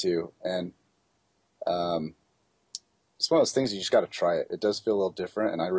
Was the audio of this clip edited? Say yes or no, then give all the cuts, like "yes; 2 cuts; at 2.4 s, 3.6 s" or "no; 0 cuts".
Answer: no; 0 cuts